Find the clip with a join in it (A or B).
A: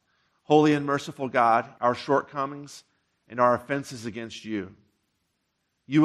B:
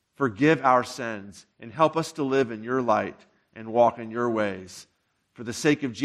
A